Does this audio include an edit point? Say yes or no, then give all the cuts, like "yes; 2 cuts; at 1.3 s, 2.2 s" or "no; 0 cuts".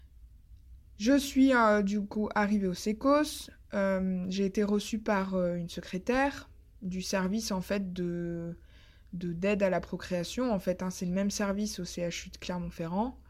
no; 0 cuts